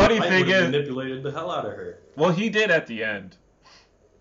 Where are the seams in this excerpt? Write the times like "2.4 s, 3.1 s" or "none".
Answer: none